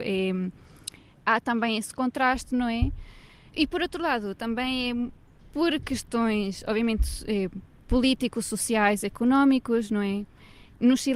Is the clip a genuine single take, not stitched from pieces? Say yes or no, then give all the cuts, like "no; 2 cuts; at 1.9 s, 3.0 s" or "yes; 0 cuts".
no; 1 cut; at 3.5 s